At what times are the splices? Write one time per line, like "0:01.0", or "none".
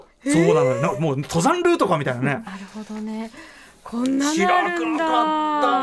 0:02.5